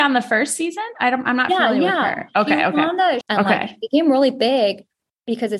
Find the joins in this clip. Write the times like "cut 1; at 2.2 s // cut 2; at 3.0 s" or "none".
cut 1; at 3.2 s